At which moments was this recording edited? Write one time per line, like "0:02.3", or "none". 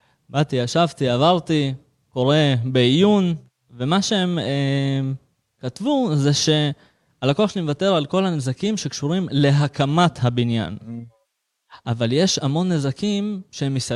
none

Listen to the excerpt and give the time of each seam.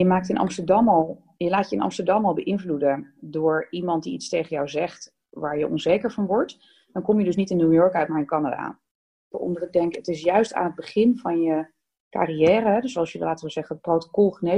0:09.3

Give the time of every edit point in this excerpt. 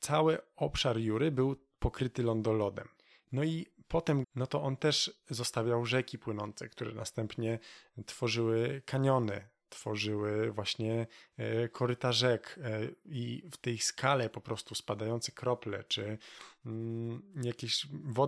0:04.2

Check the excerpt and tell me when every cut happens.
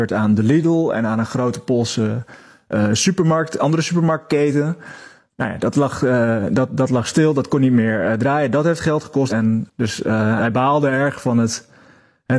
0:09.3
0:10.4

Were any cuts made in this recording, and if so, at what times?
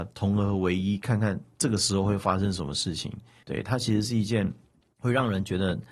none

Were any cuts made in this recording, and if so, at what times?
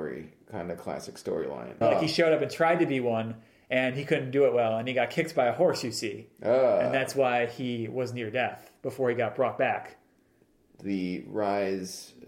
0:01.8

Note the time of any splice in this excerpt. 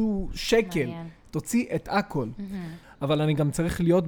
0:02.8

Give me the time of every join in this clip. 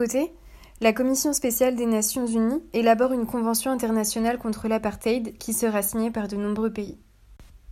none

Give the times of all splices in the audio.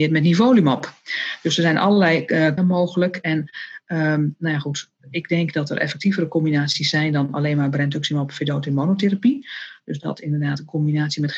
0:02.6

